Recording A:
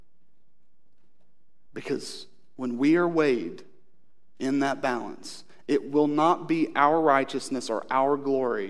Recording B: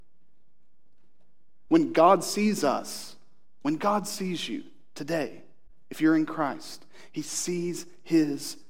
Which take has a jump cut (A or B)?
B